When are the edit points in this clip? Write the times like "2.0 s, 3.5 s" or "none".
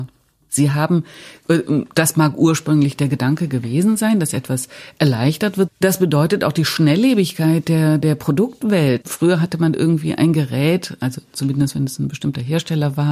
5.7 s, 9.0 s